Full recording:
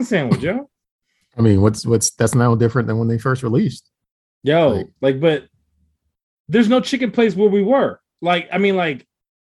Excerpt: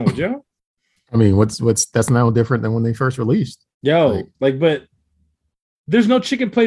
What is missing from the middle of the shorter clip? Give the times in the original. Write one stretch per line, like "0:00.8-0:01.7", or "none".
0:04.0-0:04.3